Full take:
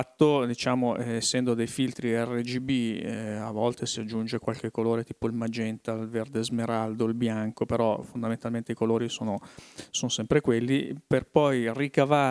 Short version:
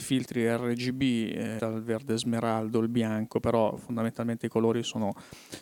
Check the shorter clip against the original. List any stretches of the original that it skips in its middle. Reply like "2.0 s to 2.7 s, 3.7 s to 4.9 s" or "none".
3.3 s to 5.8 s

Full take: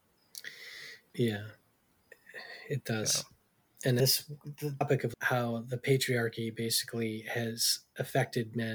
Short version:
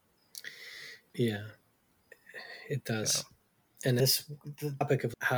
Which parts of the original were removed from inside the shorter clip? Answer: none

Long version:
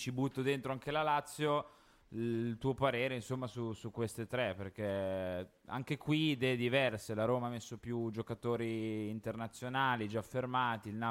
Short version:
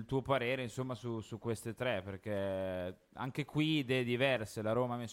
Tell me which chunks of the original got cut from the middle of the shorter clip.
none

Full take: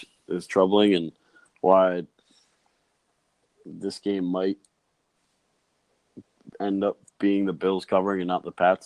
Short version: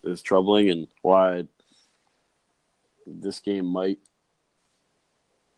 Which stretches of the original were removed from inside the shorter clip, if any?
1.2 s to 1.5 s

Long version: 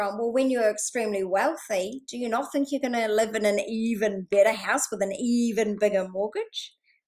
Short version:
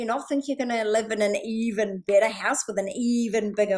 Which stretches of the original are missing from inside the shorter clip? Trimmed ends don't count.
none

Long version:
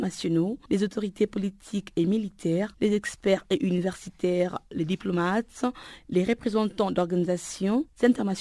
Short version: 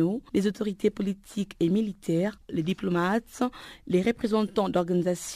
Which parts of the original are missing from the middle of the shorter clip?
2.8 s to 4.6 s

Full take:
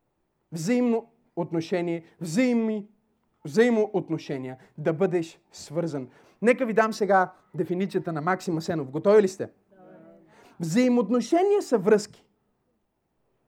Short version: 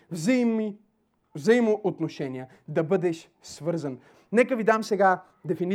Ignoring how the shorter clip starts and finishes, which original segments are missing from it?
none

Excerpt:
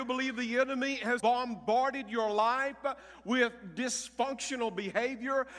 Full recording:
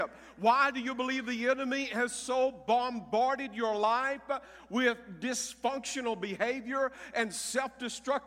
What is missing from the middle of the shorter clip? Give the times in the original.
2.1 s to 2.6 s

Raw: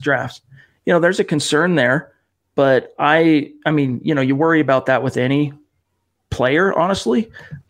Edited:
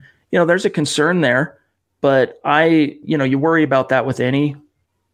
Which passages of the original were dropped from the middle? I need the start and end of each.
3.6 s to 4.0 s

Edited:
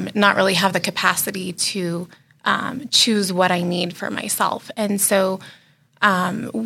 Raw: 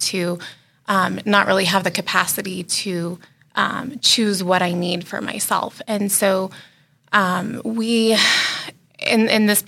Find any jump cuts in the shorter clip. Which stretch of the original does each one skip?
none

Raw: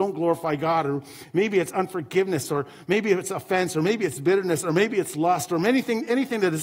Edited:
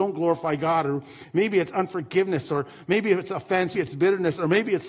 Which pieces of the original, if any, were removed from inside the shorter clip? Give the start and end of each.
3.7 s to 4.0 s

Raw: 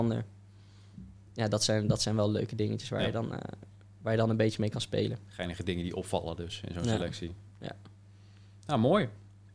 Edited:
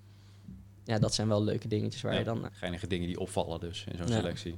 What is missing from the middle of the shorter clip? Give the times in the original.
1.5 s to 1.9 s, 3.3 s to 5.2 s

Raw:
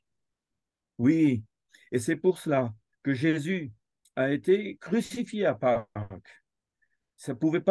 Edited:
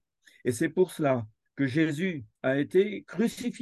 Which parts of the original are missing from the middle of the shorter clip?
3.8 s to 4.1 s

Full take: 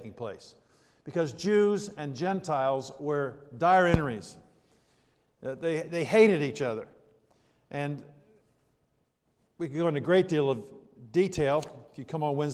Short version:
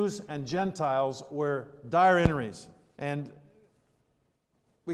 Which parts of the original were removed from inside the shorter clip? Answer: 4.6 s to 7.7 s

